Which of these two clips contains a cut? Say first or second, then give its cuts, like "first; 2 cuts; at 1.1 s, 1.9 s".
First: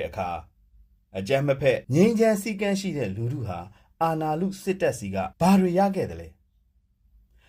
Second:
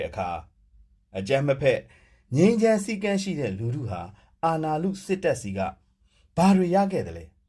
first; 2 cuts; at 1.8 s, 5.3 s